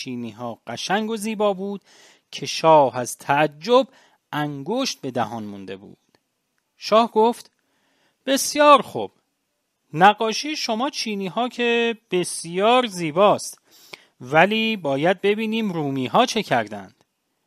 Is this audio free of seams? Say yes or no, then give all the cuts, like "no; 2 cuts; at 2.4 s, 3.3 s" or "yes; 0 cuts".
yes; 0 cuts